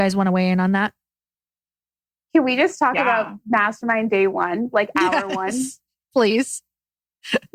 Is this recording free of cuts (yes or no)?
yes